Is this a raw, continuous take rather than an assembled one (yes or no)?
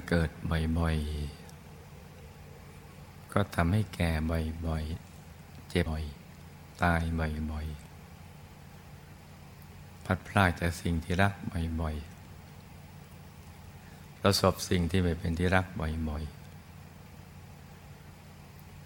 no